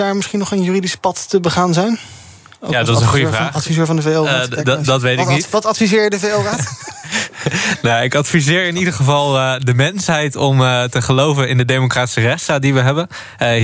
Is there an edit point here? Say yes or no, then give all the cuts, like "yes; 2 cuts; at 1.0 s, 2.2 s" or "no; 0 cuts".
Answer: no; 0 cuts